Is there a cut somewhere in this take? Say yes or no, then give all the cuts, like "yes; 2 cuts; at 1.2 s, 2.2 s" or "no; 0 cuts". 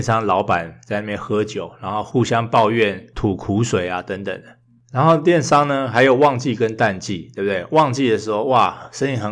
no; 0 cuts